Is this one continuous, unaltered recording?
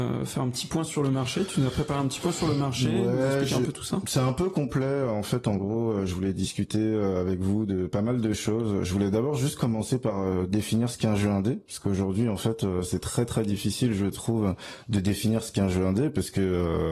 yes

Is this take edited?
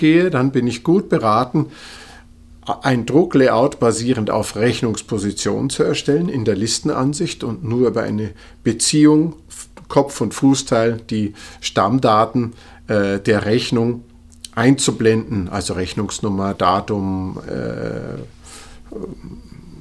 no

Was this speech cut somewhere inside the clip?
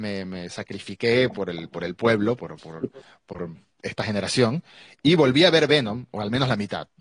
no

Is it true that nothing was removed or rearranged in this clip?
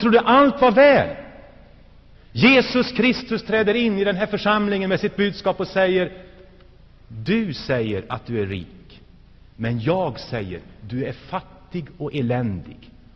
no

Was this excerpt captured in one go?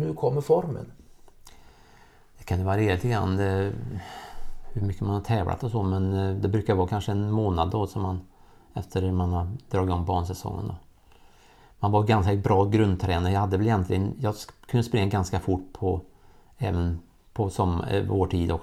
yes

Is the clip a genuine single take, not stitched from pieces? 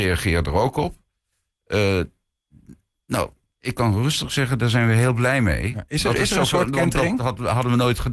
yes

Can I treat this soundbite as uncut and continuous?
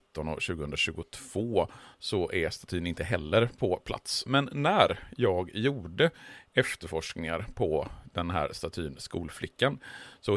no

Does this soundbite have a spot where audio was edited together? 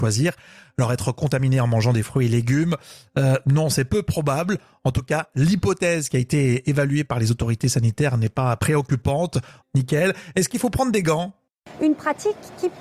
yes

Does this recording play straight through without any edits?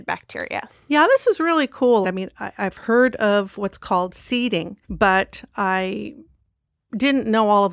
no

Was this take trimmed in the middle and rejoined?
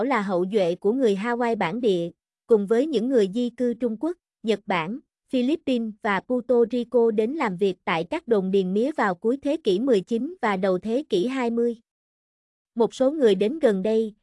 no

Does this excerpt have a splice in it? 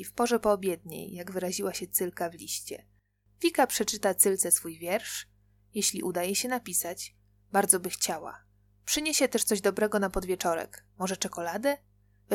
no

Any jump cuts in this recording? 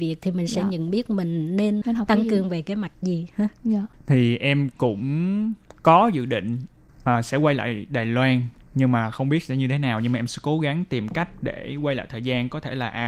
yes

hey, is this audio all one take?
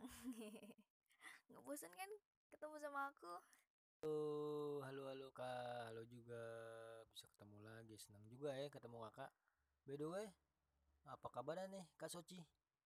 yes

